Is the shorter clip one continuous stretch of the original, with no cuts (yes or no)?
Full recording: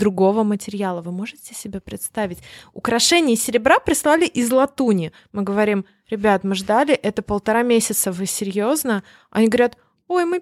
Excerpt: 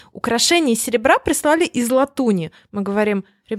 yes